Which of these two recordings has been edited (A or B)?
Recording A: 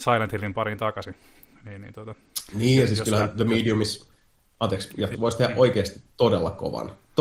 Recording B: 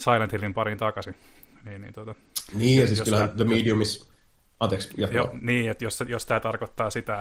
A